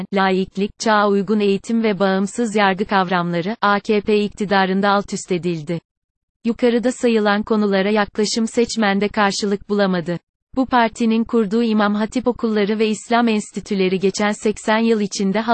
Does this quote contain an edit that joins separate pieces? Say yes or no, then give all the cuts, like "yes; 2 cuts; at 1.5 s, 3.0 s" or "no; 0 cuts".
yes; 1 cut; at 10.5 s